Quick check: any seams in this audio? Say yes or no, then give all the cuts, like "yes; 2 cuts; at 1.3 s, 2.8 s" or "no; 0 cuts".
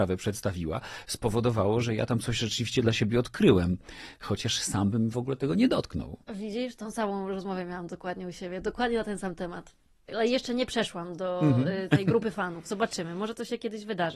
yes; 1 cut; at 6.2 s